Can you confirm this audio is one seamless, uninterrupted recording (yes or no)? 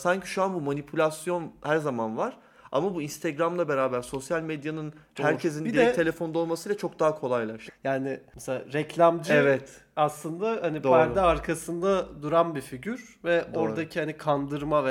no